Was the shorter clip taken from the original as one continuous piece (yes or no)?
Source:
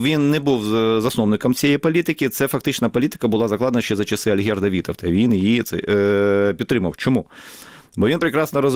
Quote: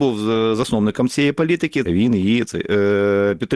no